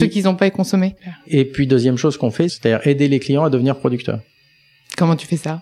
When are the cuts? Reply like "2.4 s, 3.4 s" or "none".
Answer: 1.0 s, 2.5 s